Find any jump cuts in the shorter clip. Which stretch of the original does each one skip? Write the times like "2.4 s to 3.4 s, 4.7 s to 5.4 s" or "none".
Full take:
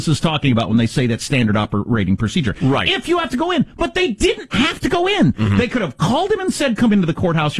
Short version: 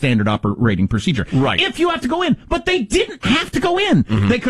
none